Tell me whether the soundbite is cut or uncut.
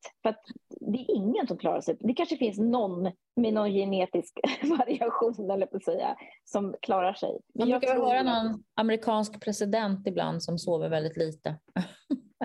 uncut